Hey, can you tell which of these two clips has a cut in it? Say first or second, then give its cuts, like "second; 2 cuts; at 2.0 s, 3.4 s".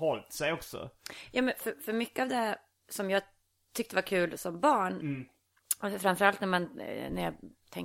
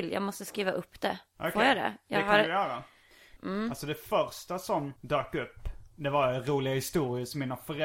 second; 2 cuts; at 3.4 s, 5.0 s